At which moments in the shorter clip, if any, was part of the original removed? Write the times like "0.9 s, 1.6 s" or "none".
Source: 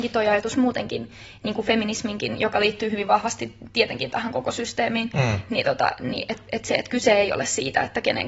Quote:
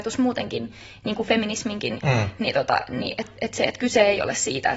2.0 s